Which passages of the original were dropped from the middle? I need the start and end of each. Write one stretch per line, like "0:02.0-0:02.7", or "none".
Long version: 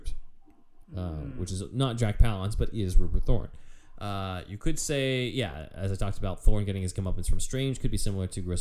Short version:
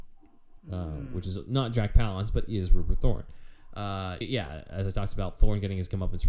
0:04.5-0:05.3

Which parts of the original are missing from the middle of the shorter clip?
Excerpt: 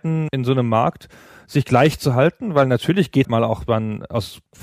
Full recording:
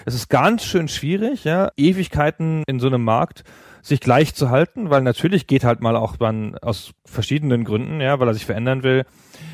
0:05.6-0:05.8

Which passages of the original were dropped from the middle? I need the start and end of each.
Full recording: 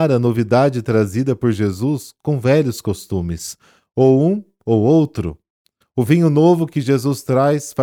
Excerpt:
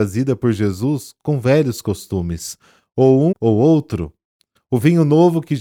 0:04.3-0:04.6

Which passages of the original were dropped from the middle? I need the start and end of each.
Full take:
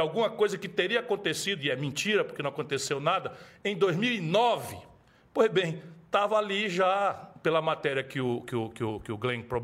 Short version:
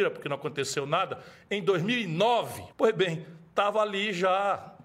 0:04.9-0:05.3

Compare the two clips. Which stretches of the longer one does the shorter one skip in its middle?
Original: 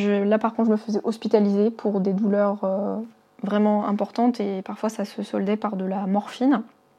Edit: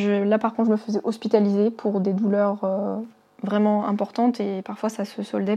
none

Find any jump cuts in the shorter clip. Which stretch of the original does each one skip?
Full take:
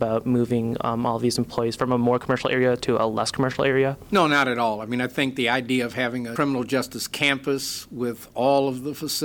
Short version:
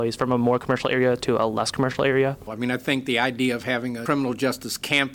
0:04.1-0:04.8

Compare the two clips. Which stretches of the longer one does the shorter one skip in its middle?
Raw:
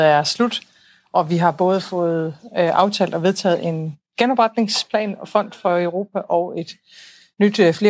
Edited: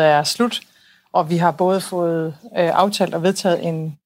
none

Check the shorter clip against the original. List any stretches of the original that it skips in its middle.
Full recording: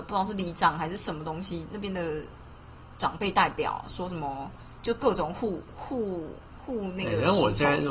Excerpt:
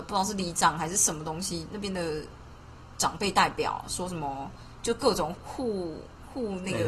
0:05.3-0:05.7

